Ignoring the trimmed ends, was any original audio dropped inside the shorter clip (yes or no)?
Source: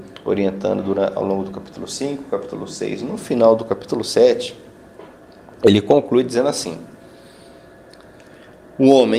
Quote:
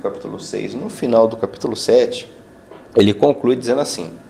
yes